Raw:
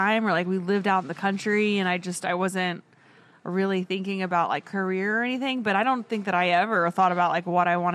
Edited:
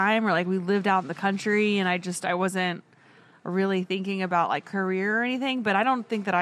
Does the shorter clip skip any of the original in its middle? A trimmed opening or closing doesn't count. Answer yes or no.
no